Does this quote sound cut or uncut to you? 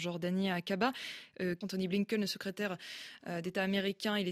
cut